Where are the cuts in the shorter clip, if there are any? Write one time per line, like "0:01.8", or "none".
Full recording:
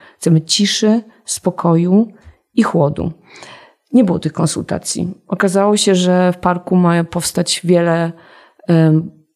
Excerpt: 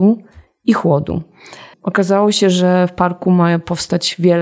0:01.7